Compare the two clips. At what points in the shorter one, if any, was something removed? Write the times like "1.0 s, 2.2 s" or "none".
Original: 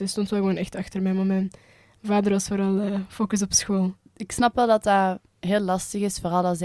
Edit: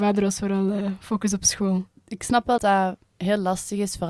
2.6 s